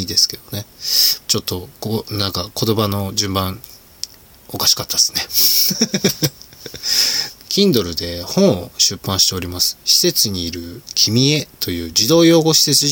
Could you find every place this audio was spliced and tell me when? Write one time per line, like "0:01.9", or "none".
0:01.2
0:07.5